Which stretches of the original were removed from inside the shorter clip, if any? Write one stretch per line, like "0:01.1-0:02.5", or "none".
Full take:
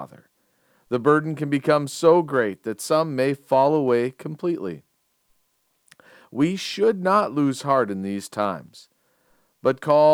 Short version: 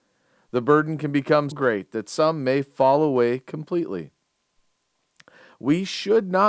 0:01.9-0:02.2

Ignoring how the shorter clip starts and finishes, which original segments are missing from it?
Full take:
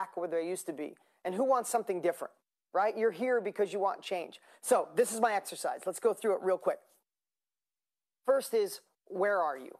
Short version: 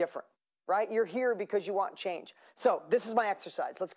none

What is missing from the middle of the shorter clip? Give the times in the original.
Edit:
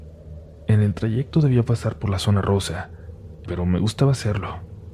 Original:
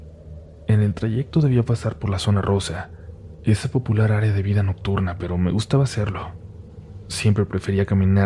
0:03.5-0:05.2

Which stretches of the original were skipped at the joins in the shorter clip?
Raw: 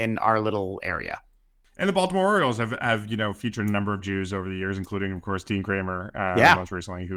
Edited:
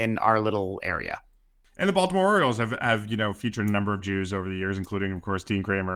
none

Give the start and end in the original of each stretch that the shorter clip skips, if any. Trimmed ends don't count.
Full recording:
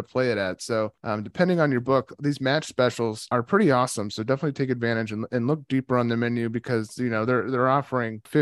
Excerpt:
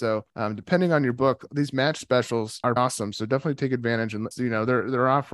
0:03.4-0:03.7
0:05.3-0:06.9

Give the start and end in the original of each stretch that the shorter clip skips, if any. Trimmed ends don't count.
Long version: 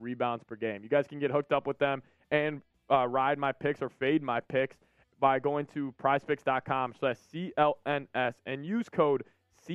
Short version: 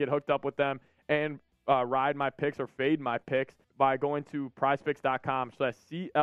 0:04.9-0:05.1

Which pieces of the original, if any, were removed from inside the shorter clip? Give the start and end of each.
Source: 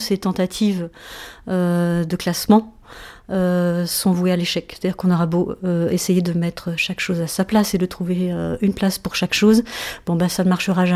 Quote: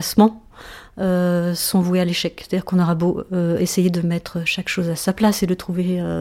none

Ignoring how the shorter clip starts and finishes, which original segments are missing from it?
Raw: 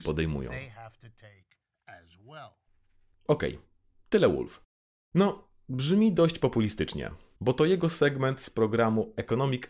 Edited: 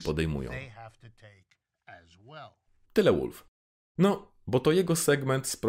0:02.8-0:04.0
0:05.6-0:07.4

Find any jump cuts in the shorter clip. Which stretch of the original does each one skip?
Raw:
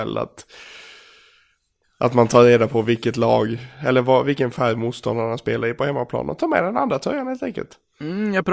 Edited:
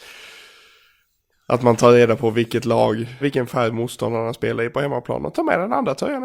0:03.7-0:04.2

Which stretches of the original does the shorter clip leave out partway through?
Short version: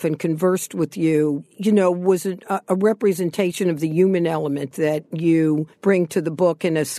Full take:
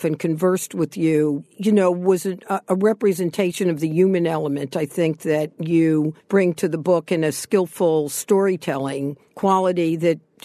0:04.7-0:05.2

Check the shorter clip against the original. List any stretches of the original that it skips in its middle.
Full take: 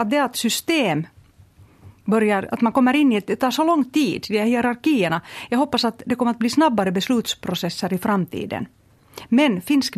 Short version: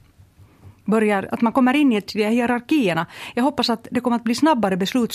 0:03.3-0:04.2

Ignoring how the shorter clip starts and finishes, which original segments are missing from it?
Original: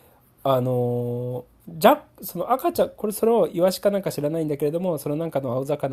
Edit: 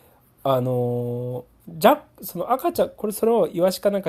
none

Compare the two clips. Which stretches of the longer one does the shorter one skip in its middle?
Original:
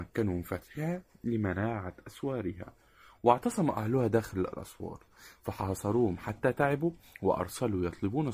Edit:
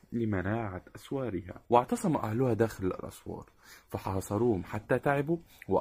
0:02.8-0:03.2

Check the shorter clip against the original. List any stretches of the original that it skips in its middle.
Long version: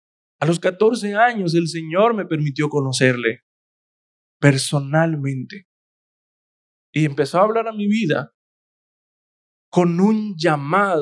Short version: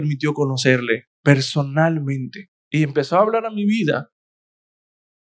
0:03.5-0:04.3
0:05.8-0:06.8

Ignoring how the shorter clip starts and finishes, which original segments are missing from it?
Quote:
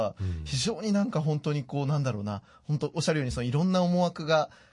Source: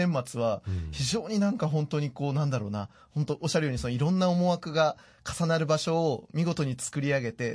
none

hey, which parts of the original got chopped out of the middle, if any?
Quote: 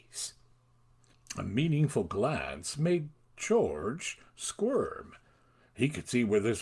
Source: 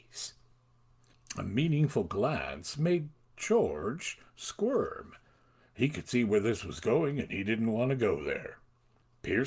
none

